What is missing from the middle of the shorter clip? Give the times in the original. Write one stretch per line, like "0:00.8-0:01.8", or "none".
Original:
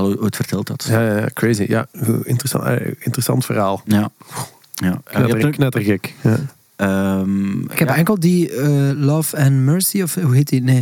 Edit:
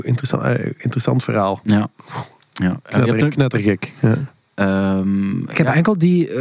none